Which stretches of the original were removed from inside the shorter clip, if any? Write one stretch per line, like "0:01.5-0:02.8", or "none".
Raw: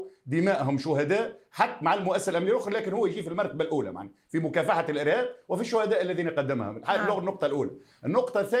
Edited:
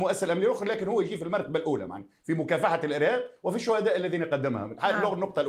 none